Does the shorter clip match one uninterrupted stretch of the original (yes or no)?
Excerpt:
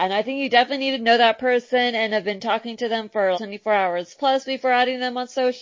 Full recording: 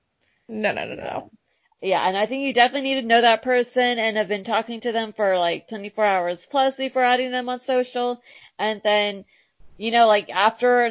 no